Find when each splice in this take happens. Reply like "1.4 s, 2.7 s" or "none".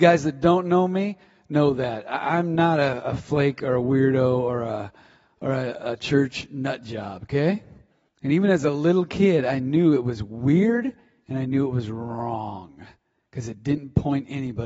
8.1 s